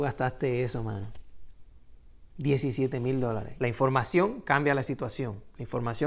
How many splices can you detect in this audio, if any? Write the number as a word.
one